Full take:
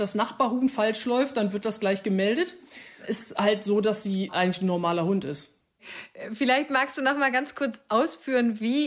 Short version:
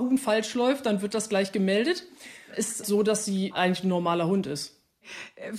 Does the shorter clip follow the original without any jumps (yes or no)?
no